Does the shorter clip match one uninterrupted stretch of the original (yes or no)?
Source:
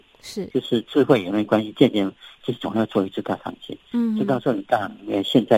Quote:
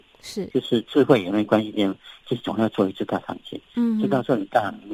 no